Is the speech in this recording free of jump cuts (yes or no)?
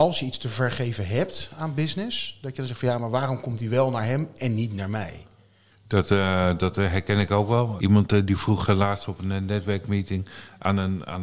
no